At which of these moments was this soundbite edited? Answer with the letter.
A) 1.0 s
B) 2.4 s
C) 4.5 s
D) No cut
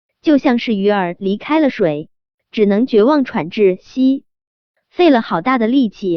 D